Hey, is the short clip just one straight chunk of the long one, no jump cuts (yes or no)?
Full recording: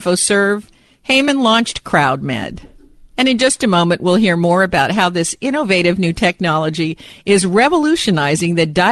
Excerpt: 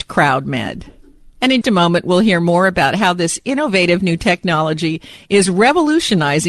no